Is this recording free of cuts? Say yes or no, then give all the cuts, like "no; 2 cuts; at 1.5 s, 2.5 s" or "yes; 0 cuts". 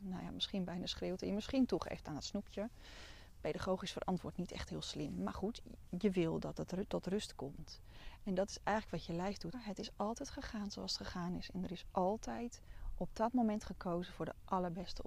no; 1 cut; at 9.5 s